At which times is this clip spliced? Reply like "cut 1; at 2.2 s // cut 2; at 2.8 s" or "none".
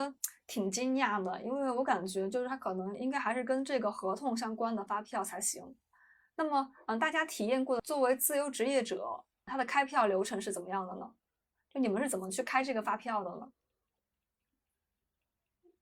none